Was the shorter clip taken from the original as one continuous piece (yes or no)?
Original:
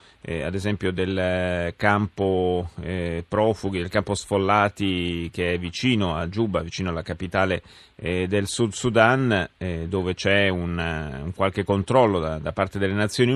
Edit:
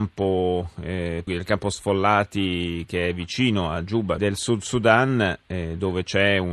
no